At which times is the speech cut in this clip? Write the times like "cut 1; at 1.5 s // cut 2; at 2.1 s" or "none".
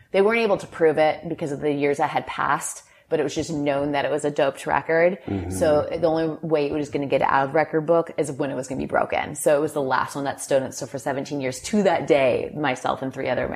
none